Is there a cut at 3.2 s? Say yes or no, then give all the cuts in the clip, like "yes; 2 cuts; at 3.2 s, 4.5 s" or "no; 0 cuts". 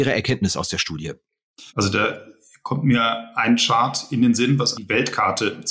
no; 2 cuts; at 1.7 s, 4.7 s